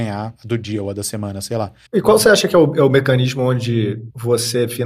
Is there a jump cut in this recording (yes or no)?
yes